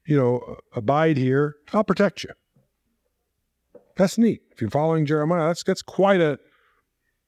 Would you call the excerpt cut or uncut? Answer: uncut